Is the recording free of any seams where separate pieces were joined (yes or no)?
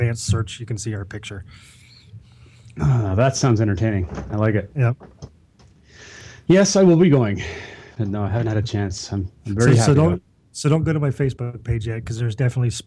yes